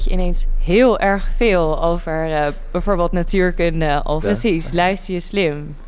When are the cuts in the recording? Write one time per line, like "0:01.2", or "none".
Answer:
0:04.2